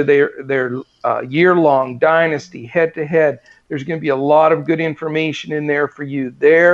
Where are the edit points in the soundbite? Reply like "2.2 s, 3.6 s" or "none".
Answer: none